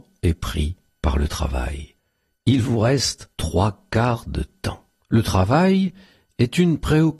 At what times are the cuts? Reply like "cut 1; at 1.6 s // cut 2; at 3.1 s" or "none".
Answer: cut 1; at 5.0 s